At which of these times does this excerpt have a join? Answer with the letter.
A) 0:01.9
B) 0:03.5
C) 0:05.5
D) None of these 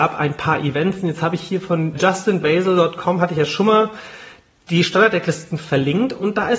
A